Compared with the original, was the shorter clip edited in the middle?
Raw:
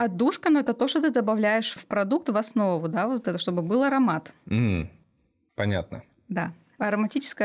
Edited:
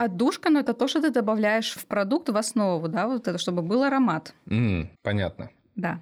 yes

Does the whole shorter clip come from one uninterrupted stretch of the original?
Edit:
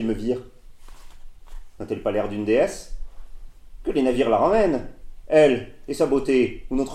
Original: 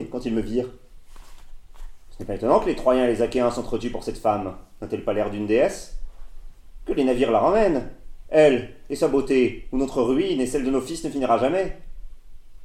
no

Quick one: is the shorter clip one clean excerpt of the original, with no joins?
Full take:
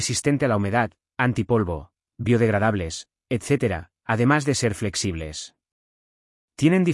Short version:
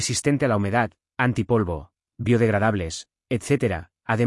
yes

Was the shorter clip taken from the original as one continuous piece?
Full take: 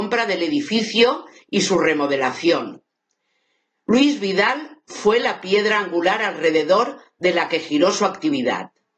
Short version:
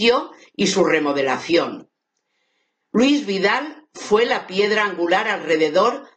yes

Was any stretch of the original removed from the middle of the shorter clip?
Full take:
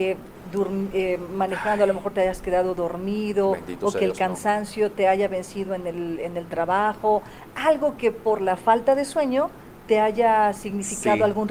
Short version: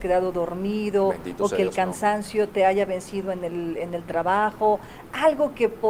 no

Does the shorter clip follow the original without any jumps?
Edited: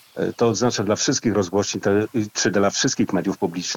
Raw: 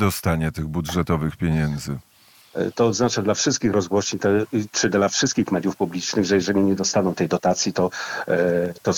yes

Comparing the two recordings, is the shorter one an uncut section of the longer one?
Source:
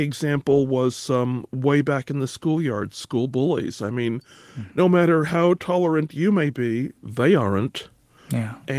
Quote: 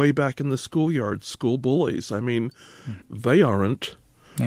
no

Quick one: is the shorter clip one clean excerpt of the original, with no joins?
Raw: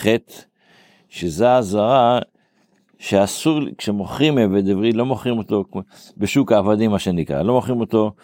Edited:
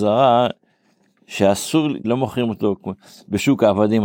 no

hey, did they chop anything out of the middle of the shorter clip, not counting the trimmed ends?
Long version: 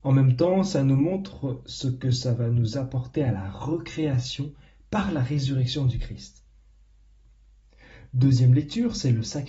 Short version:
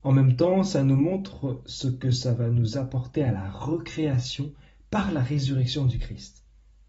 no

